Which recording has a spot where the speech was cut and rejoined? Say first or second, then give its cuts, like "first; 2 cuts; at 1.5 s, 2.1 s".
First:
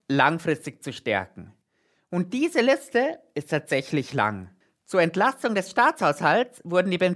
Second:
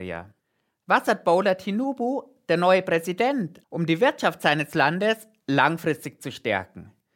second; 1 cut; at 3.6 s